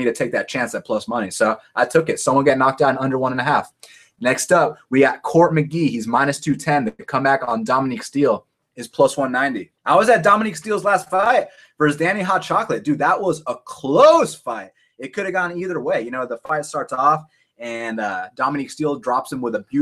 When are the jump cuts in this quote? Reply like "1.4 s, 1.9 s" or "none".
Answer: 9.8 s

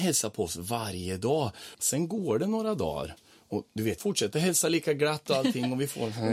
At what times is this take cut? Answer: 1.7 s, 4.0 s

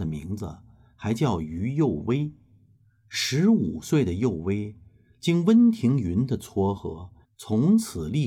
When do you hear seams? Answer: 7.2 s

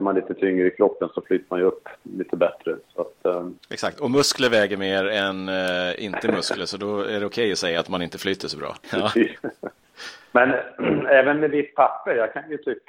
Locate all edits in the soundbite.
8.8 s

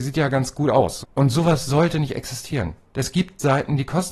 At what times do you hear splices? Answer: 1.0 s

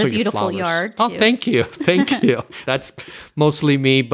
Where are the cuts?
2.6 s

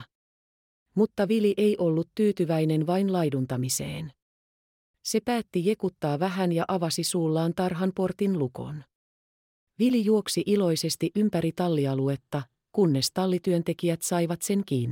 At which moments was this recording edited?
none

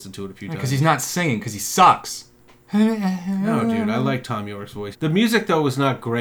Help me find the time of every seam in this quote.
4.9 s

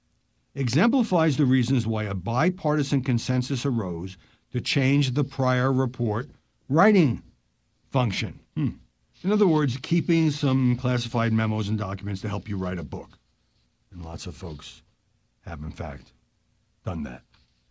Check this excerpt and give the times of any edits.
8.5 s

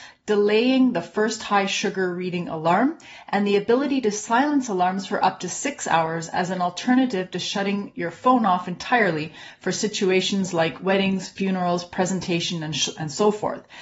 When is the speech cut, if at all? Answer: none

